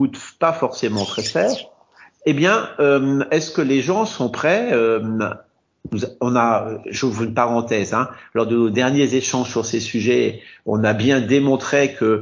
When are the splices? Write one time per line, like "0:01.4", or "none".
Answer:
none